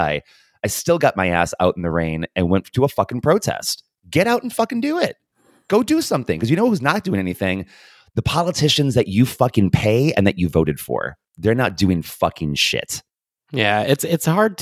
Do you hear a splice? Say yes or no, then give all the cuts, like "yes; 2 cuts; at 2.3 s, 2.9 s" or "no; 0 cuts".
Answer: no; 0 cuts